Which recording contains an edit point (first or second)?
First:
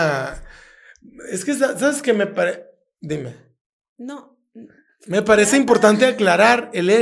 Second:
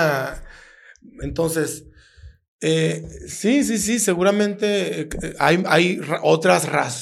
second